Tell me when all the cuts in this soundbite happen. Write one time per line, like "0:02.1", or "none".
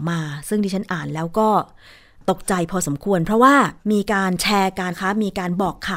0:03.8
0:04.9

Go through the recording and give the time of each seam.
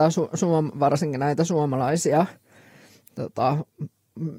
none

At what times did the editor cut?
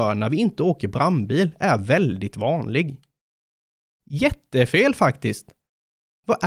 0:04.0

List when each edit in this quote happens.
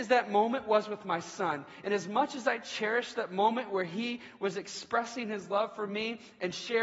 none

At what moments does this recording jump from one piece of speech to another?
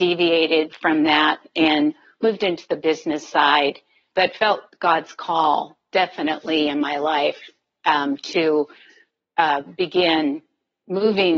0:04.1

